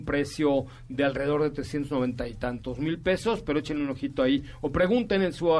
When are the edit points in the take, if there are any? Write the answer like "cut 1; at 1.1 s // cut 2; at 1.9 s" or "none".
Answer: none